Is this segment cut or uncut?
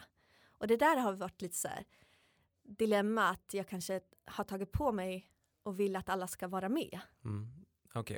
uncut